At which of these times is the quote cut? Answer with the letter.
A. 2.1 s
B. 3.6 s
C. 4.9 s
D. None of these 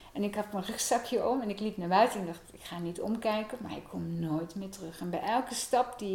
D